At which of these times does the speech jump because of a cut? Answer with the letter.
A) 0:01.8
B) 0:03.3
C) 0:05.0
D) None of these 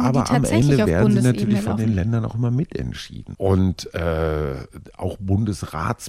B